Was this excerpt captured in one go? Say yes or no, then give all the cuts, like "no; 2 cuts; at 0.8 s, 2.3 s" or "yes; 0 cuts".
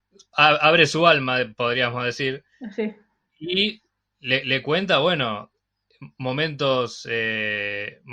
yes; 0 cuts